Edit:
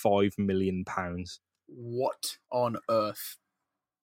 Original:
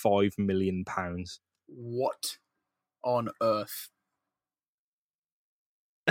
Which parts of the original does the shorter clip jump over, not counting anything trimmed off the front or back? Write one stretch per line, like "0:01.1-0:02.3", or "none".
0:02.4-0:03.0